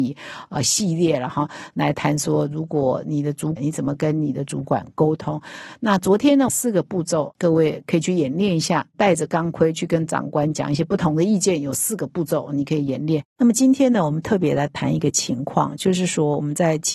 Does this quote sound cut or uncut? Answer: cut